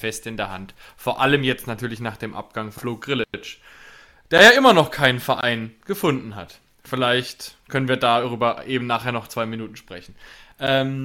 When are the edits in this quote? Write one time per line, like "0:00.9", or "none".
none